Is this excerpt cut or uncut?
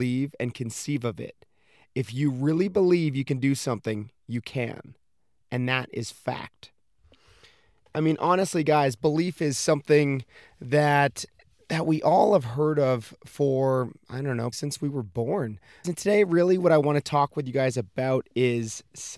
cut